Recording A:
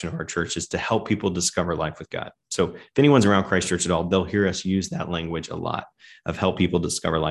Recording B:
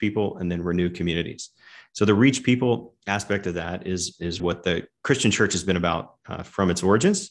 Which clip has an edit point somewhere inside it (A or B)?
B